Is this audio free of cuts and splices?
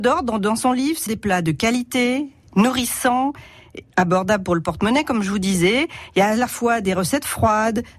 no; 2 cuts; at 1.1 s, 2.4 s

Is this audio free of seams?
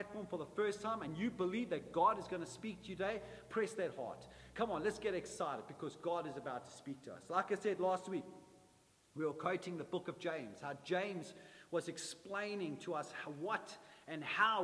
yes; 0 cuts

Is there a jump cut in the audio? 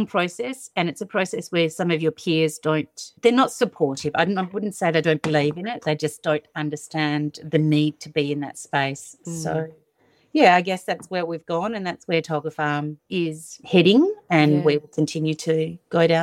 no; 0 cuts

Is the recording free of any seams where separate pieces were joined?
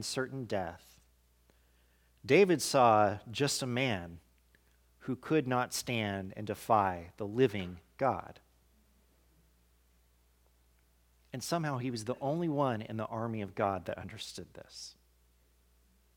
yes; 0 cuts

